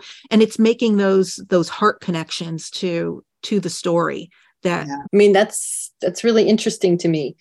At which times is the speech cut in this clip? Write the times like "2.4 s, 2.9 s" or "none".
5.0 s

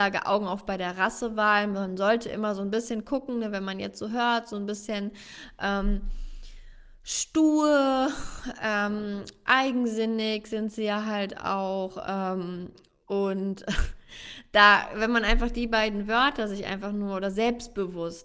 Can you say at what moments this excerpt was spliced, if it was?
none

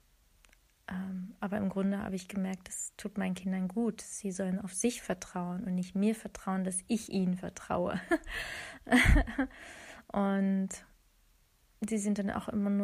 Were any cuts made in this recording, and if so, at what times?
none

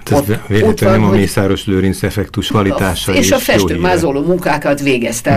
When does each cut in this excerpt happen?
2.5 s

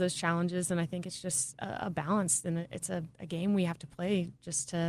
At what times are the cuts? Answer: 3.1 s

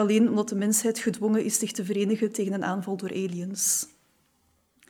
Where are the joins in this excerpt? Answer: none

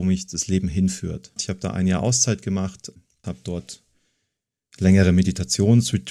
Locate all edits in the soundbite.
1.4 s, 3.2 s

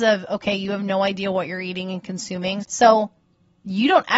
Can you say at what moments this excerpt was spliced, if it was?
2.6 s

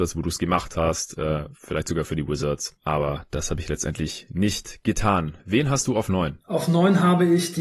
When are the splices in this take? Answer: none

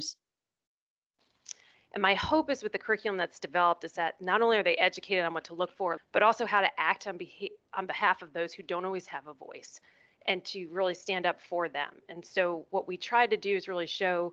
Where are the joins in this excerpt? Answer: 1.7 s, 6.0 s

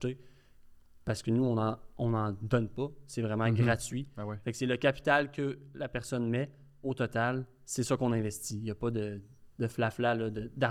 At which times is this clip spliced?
none

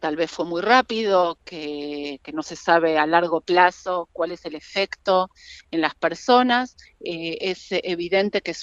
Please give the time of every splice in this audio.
6.8 s

